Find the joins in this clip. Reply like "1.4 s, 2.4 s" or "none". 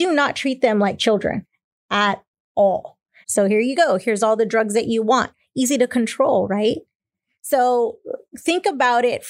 3.2 s